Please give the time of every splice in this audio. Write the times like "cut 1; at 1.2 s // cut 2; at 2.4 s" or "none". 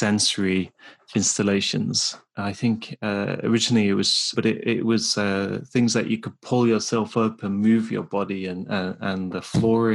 cut 1; at 4.3 s